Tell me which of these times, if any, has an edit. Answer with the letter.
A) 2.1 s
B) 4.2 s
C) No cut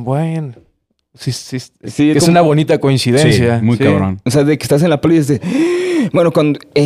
A